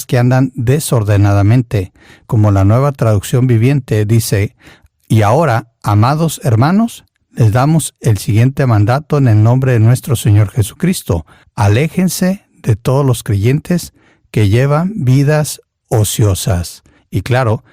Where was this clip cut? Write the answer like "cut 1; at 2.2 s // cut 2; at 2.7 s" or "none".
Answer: cut 1; at 2.2 s